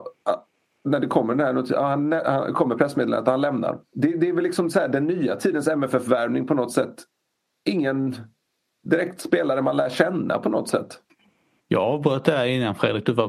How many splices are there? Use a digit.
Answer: 3